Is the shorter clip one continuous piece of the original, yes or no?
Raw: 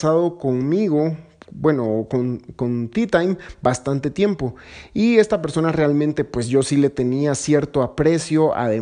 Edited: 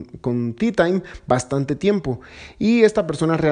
yes